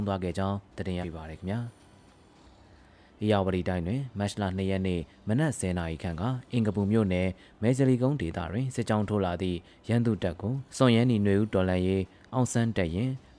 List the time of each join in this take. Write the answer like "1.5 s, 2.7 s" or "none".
1.0 s, 10.7 s